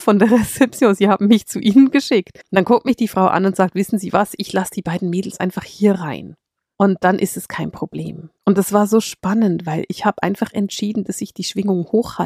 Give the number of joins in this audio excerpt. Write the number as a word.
zero